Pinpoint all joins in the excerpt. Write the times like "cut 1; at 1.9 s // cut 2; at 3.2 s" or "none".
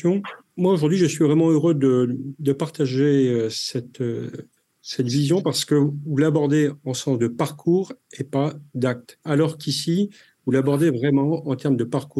cut 1; at 9.2 s